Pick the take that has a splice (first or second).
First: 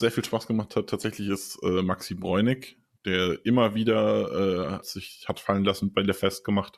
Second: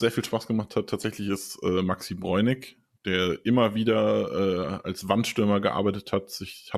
first